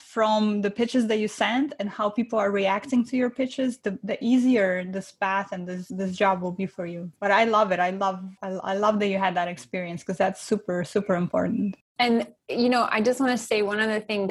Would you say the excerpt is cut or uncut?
uncut